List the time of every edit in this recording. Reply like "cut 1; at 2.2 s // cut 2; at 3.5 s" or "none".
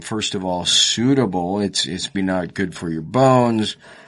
cut 1; at 2.1 s